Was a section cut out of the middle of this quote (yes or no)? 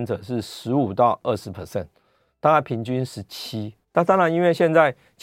yes